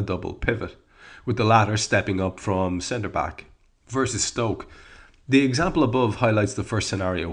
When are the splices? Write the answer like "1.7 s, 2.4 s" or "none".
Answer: 3.7 s